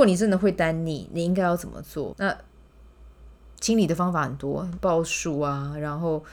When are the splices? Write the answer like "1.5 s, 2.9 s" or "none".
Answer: 2.1 s